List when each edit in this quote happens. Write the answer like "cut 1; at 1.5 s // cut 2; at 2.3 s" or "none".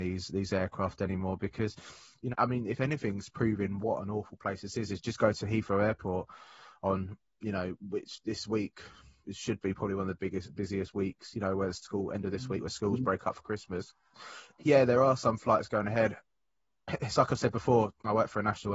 cut 1; at 2.3 s